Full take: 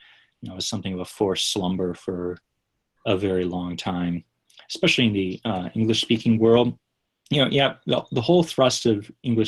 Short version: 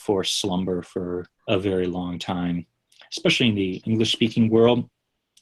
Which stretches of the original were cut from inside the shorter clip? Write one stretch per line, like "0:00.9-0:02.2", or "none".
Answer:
0:02.5-0:02.9
0:05.4-0:05.7